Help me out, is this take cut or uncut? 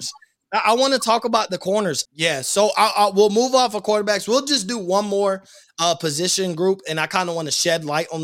cut